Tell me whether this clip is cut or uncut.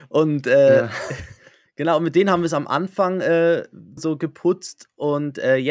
cut